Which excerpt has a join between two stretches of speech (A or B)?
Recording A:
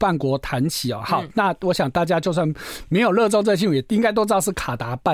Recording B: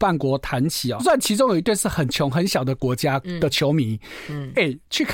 B